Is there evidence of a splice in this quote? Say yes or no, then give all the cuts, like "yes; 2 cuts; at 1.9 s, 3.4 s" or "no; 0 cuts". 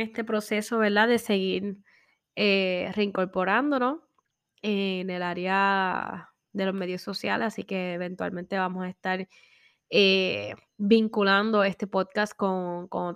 no; 0 cuts